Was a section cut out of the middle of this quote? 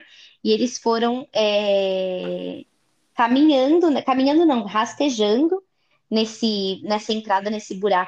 no; 0 cuts

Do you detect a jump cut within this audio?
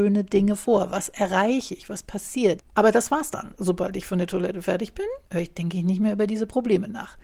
yes; 2 cuts; at 2.6 s, 5.3 s

